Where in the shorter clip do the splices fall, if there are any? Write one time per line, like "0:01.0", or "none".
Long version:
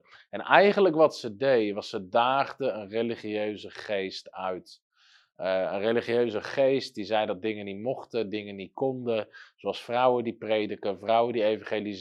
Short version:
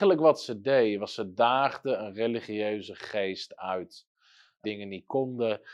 0:04.6